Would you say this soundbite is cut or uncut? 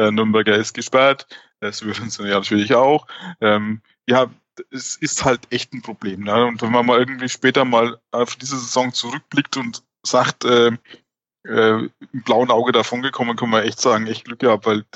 uncut